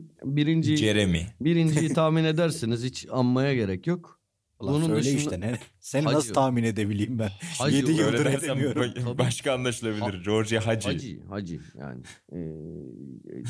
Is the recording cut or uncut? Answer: uncut